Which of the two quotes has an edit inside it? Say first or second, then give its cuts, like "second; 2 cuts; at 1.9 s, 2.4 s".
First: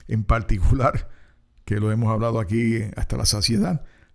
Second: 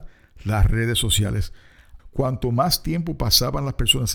second; 1 cut; at 2.0 s